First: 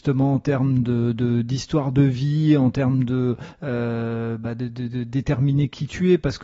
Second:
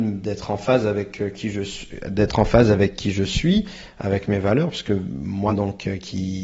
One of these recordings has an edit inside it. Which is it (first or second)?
second